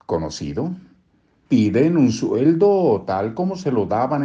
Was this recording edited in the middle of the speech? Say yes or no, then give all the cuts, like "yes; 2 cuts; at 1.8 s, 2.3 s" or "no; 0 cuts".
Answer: yes; 1 cut; at 1.5 s